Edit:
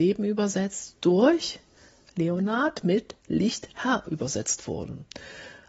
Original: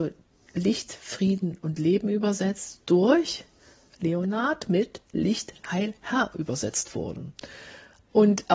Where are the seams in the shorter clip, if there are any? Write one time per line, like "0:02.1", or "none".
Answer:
0:03.7